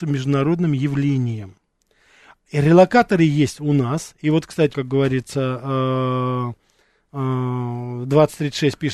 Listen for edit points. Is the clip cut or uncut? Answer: cut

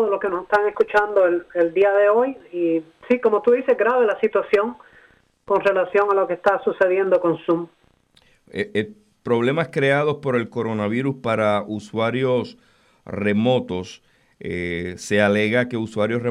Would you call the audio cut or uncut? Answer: uncut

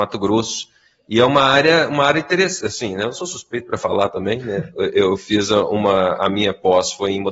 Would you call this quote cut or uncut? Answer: uncut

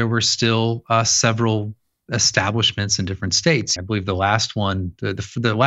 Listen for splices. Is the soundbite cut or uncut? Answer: cut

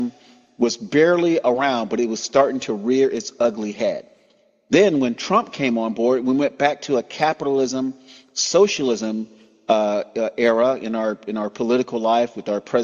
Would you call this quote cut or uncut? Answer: uncut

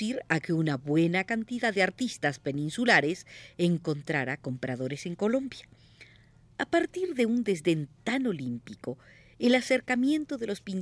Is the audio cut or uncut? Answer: uncut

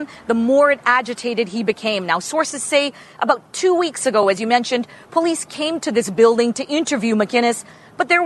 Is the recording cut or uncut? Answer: uncut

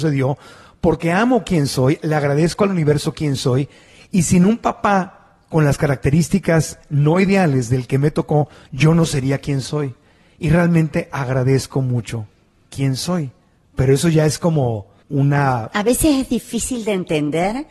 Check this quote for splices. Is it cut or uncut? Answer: uncut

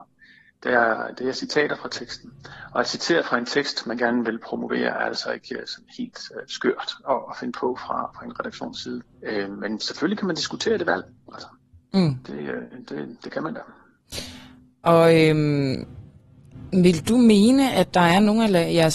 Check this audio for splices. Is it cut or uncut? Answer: cut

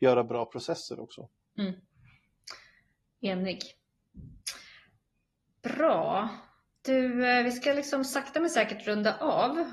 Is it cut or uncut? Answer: uncut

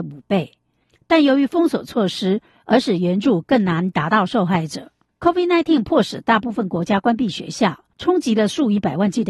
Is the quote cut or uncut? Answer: cut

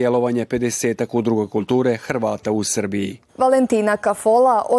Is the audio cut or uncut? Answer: cut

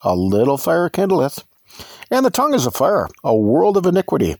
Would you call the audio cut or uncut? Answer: uncut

